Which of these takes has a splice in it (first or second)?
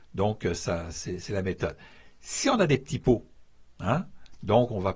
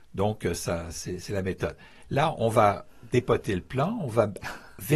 second